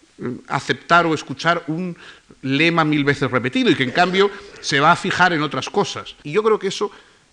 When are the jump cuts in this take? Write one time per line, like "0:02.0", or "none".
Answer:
0:06.2